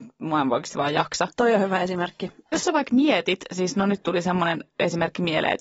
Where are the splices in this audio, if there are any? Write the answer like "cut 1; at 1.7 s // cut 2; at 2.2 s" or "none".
cut 1; at 2.5 s